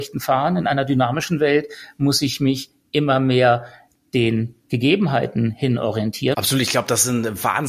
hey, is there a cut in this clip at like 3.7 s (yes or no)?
no